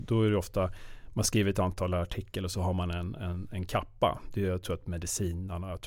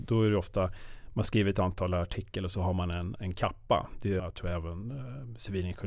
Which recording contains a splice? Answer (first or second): second